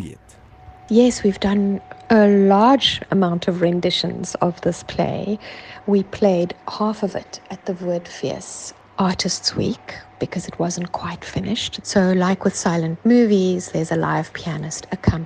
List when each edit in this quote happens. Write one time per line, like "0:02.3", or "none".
0:05.8
0:11.8